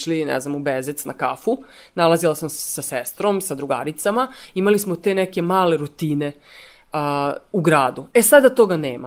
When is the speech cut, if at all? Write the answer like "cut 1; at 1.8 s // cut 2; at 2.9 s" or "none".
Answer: none